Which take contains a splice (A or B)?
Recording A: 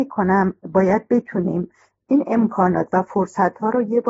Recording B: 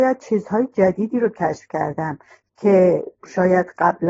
B